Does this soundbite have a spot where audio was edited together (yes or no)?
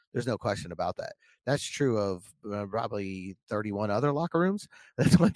no